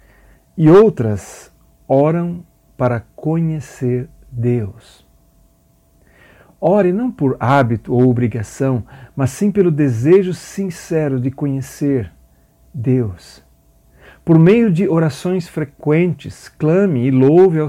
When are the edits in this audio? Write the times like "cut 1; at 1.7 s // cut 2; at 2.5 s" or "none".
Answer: none